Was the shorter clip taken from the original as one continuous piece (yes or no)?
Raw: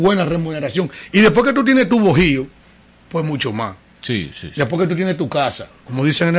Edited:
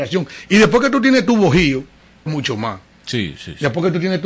no